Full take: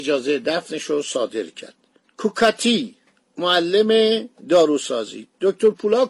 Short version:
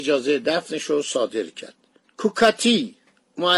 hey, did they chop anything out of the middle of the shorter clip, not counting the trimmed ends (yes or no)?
no